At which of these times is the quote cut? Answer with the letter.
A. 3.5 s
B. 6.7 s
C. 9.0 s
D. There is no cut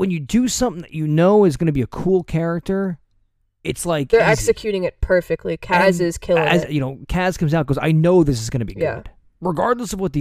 B